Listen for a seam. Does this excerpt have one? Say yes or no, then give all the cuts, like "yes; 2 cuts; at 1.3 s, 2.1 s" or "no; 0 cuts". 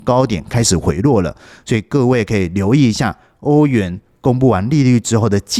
no; 0 cuts